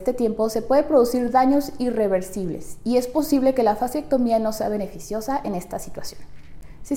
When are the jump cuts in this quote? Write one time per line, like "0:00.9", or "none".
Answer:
none